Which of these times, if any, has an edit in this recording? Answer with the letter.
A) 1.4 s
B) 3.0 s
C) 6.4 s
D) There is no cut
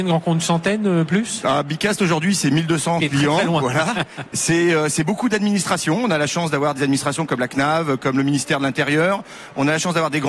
B